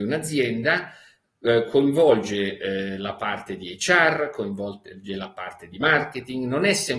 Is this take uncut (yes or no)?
yes